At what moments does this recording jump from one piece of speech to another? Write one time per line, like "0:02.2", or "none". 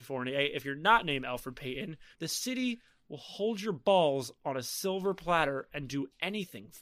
0:02.1